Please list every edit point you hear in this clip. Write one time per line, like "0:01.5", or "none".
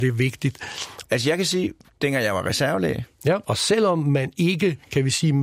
0:01.0
0:03.4

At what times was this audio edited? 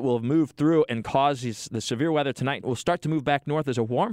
0:02.6

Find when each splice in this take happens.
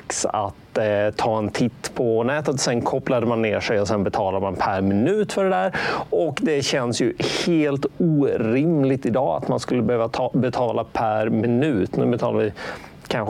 none

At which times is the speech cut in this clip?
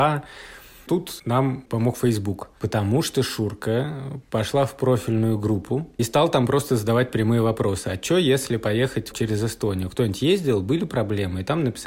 0:09.1

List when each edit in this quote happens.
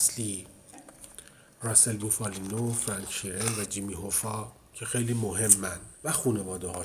0:05.9

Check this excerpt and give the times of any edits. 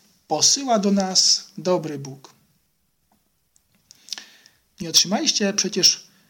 0:04.7

